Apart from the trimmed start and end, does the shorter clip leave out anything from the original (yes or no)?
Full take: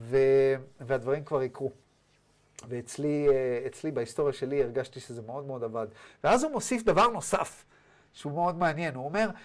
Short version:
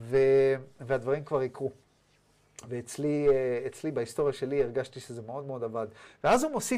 no